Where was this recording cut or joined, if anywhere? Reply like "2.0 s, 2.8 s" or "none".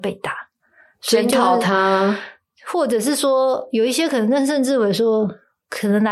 none